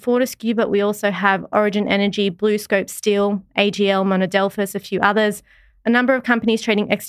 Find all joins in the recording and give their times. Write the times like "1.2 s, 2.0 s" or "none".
none